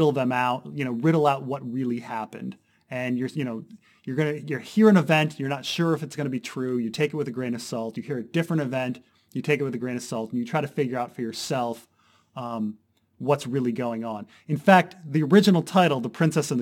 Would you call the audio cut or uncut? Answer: uncut